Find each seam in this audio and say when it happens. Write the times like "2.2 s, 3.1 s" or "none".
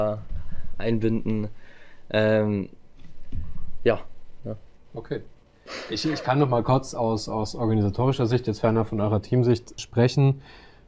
9.8 s